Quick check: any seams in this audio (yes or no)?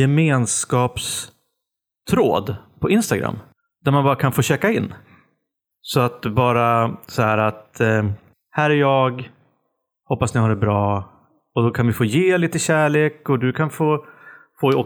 no